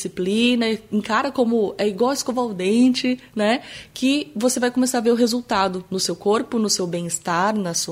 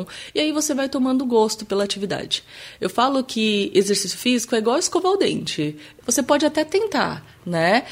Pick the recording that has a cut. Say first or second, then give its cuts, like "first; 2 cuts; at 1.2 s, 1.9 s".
second; 1 cut; at 6.0 s